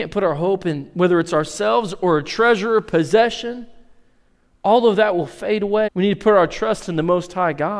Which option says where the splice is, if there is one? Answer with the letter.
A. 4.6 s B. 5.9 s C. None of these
B